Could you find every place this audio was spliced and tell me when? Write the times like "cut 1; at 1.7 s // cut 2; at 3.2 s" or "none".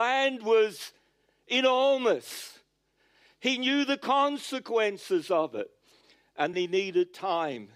cut 1; at 6.5 s